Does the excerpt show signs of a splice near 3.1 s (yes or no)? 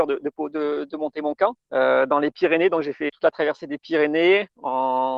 yes